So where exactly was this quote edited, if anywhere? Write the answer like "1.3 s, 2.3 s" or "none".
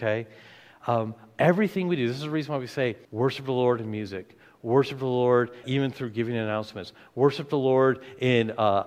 3.0 s, 5.6 s